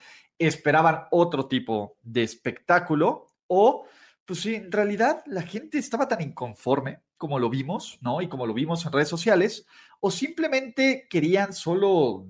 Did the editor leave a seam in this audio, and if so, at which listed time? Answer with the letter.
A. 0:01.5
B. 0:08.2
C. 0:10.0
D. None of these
D